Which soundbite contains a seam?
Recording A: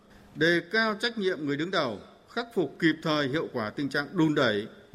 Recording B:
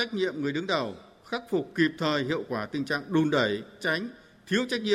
B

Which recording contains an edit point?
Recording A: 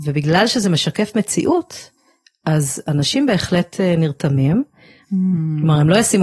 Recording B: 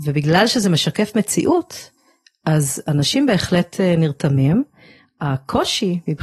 A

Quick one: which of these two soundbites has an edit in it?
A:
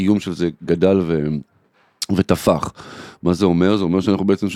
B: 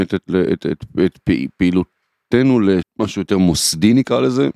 B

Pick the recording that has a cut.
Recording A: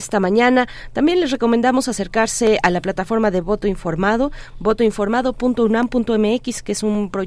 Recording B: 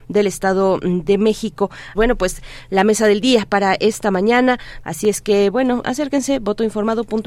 B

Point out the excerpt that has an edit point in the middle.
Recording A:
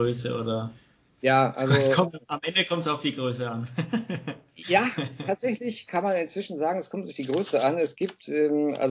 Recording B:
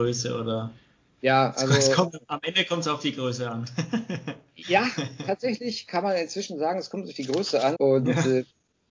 B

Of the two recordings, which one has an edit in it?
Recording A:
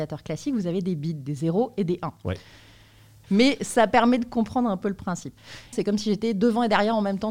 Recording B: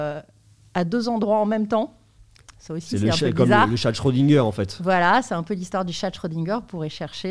A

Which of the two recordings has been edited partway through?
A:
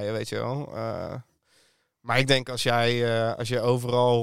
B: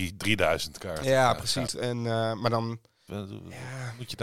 B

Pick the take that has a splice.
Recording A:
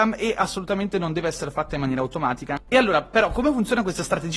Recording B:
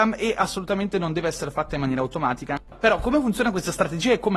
B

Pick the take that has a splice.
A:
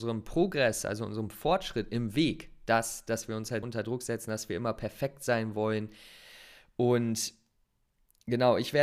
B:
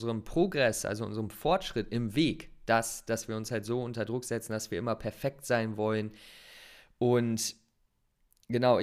A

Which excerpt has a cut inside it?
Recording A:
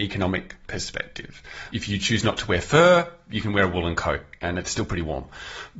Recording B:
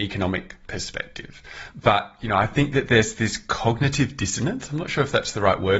B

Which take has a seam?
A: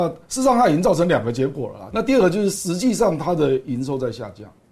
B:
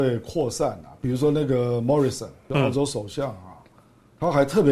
A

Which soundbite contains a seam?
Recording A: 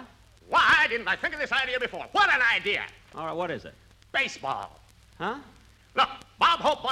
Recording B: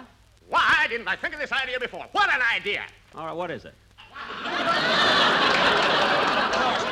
B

